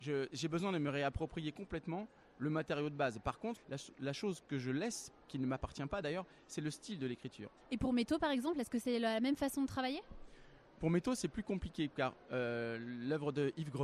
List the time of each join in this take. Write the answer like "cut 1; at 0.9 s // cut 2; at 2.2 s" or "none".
cut 1; at 3.6 s // cut 2; at 7.6 s